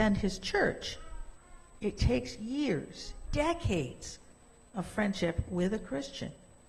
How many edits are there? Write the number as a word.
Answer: one